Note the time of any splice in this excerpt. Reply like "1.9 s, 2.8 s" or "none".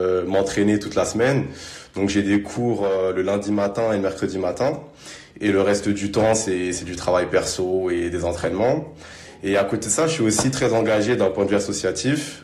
none